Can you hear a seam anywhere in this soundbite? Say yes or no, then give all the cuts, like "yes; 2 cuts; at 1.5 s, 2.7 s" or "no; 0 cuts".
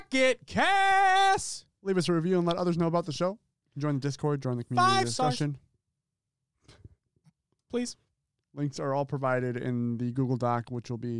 no; 0 cuts